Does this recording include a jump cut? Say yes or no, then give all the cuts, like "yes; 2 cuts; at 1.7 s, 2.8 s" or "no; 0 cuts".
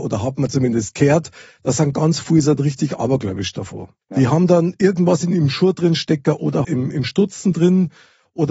yes; 2 cuts; at 4.0 s, 6.6 s